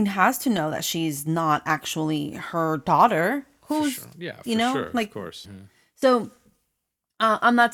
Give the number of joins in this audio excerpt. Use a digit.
1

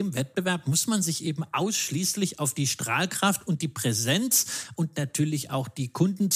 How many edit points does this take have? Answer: 0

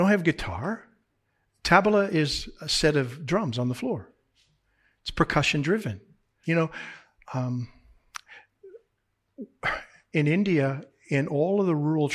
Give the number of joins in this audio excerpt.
1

